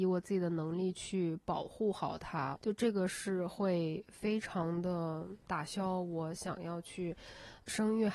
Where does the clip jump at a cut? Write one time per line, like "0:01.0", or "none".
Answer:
0:02.6